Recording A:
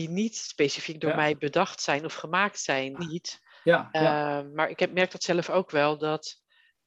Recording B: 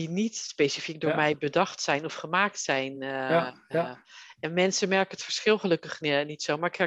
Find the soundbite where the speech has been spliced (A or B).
A